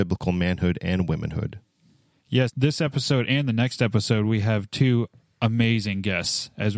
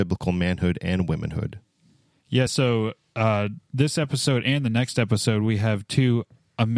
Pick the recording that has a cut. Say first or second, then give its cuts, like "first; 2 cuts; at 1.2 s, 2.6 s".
first; 1 cut; at 2.5 s